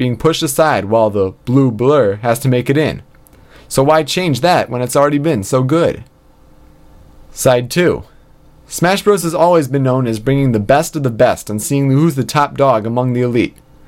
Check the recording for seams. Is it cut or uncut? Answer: uncut